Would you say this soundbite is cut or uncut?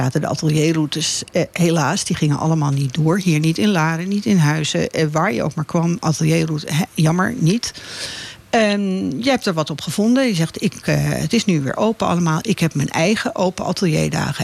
uncut